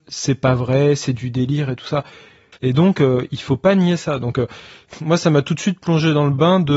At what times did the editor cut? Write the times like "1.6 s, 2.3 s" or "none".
2.6 s